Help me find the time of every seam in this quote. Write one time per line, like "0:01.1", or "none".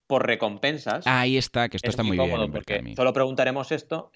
none